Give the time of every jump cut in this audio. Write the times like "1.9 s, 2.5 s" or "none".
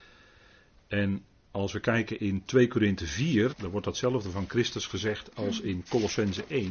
3.5 s

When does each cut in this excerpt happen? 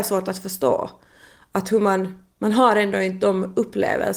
none

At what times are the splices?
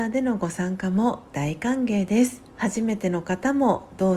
2.5 s

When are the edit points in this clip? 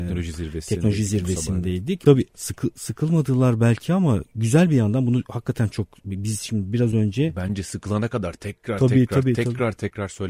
2.1 s

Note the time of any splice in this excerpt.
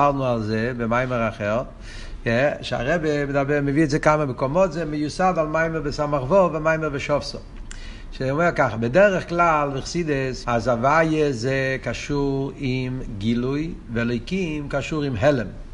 10.4 s

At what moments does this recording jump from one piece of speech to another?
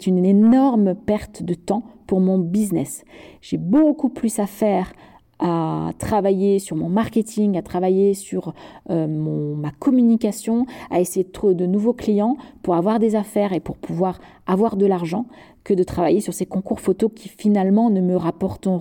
none

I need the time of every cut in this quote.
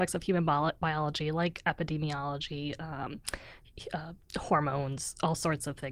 none

